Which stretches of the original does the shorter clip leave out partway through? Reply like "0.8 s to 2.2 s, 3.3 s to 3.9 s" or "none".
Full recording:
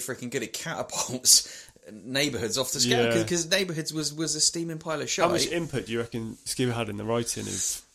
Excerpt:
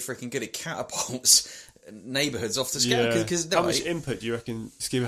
3.5 s to 5.2 s

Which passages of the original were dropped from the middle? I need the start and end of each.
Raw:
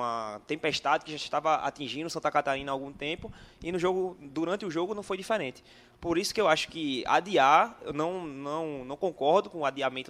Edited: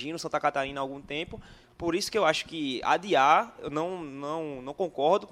3.5 s to 5.9 s

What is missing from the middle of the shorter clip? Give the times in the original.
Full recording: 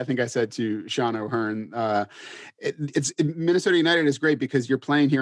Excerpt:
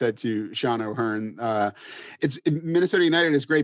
2.5 s to 2.9 s

